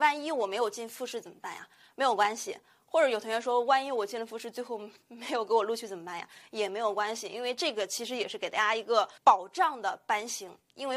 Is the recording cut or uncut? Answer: cut